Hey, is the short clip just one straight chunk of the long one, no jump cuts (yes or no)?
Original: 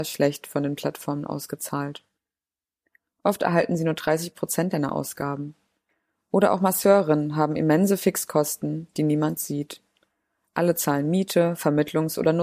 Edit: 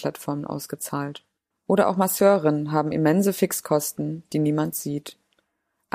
no